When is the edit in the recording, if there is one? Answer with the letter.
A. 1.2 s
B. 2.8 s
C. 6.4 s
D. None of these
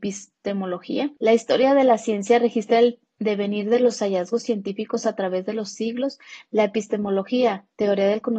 A